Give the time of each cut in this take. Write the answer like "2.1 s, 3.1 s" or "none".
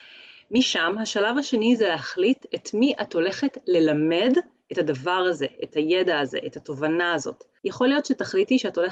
7.6 s